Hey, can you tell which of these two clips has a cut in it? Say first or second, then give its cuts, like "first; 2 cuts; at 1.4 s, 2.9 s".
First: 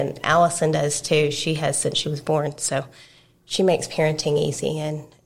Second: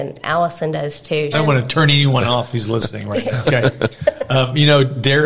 second; 2 cuts; at 1.3 s, 3.4 s